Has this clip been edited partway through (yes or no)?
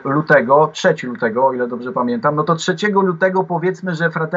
no